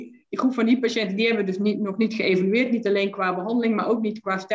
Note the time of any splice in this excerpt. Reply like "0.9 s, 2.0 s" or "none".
none